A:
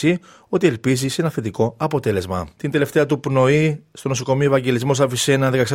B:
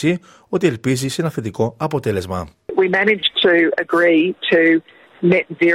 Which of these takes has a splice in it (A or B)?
A